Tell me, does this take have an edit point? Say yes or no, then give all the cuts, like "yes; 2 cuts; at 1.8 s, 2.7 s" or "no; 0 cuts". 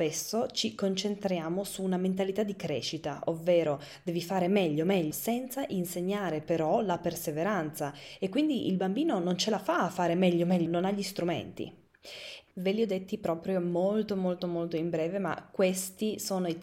yes; 3 cuts; at 5.1 s, 10.7 s, 12.5 s